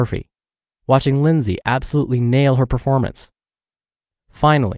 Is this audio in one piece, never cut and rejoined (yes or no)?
yes